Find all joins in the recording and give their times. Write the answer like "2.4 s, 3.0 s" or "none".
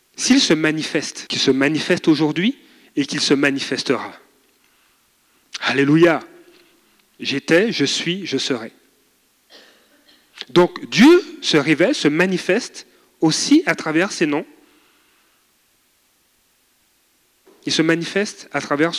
1.3 s, 7.2 s